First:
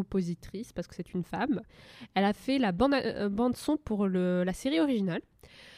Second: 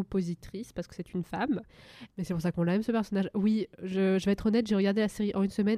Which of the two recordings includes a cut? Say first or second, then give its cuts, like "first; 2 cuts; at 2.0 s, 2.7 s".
second; 1 cut; at 2.1 s